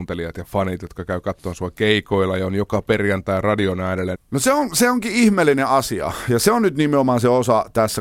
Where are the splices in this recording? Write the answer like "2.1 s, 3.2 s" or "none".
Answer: 4.1 s